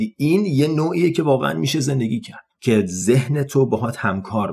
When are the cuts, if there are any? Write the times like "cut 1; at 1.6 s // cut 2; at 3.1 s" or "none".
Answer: cut 1; at 2.5 s